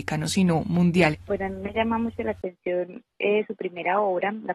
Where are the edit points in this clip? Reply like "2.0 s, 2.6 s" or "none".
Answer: 1.1 s